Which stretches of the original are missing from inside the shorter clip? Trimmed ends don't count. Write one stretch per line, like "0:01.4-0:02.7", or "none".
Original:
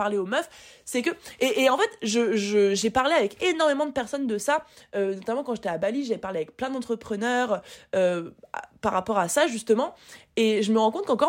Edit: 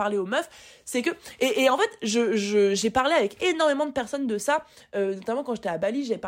none